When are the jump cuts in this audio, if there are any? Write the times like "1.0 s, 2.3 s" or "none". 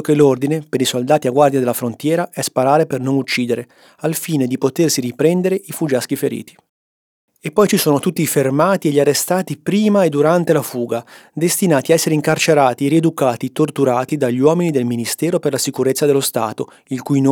none